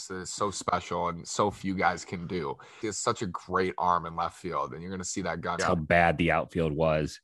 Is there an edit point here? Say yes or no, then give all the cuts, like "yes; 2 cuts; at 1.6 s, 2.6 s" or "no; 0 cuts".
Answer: yes; 2 cuts; at 2.8 s, 5.6 s